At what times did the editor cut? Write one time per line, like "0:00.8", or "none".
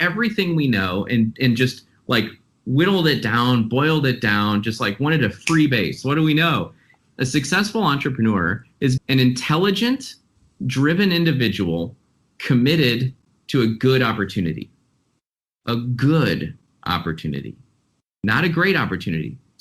0:06.0
0:09.0